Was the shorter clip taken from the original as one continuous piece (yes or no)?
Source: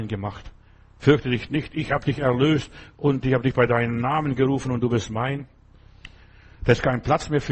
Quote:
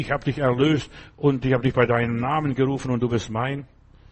yes